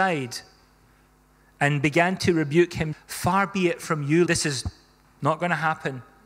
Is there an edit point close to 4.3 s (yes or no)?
yes